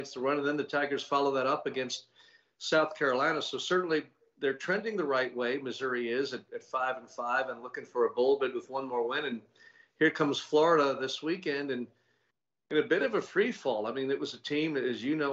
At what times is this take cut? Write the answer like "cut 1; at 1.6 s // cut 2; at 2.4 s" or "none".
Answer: none